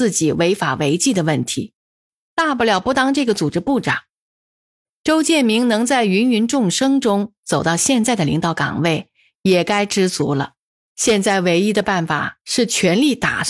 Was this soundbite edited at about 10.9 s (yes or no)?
yes